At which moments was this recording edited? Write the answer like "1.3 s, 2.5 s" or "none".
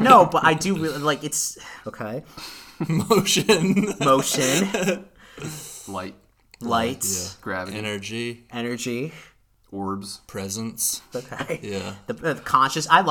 1.8 s, 11.1 s